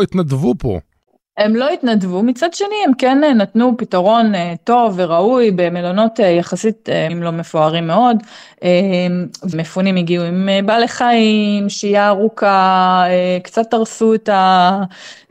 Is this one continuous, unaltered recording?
no; 2 cuts; at 7.1 s, 9.5 s

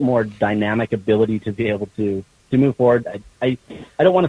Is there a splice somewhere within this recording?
yes; 1 cut; at 3.0 s

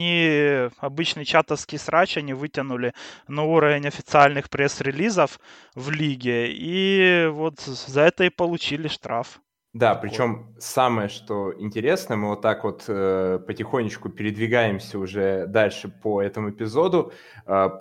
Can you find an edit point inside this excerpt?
no; 0 cuts

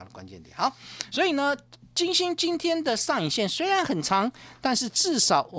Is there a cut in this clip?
no; 0 cuts

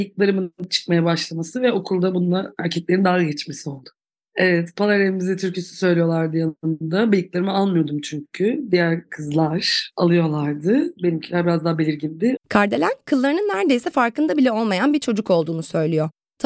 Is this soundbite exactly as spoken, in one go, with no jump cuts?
no; 1 cut; at 12.4 s

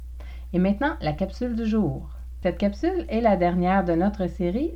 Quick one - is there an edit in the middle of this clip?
no; 0 cuts

